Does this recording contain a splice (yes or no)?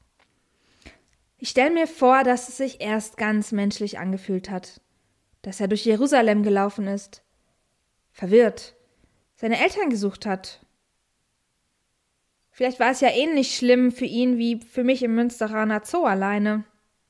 no